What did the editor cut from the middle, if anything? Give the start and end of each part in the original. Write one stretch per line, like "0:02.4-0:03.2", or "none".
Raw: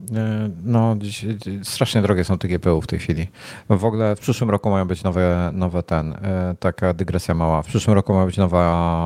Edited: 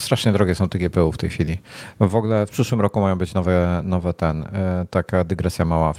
none